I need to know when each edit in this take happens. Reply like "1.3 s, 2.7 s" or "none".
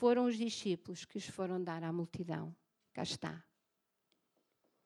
none